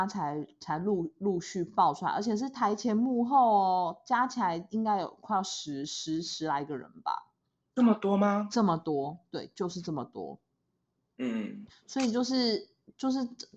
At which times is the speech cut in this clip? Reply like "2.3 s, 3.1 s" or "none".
11.7 s